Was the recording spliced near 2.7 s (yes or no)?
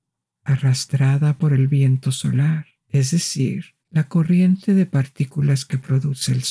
yes